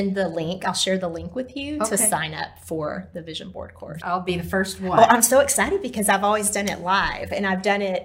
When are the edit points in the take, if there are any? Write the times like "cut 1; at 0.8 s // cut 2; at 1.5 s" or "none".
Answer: cut 1; at 4.0 s